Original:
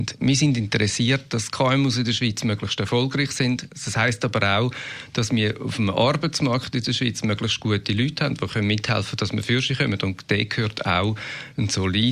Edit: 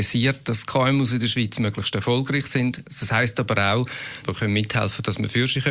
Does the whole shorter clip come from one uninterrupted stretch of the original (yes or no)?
no